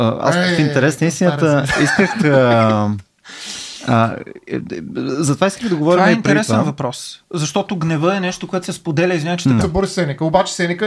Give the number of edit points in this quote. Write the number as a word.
one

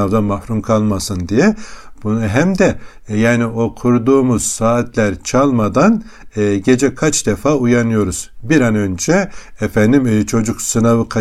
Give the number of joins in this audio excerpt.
one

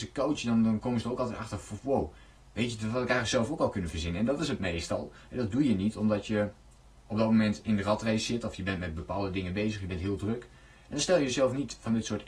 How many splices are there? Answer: zero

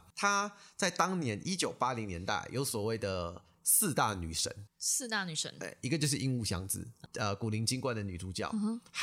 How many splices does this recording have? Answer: one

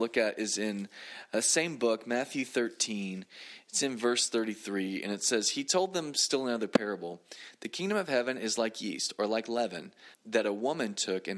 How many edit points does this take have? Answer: one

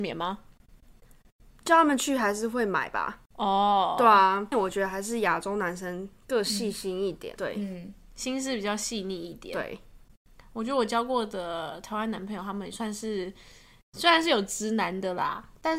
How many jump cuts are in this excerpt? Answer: three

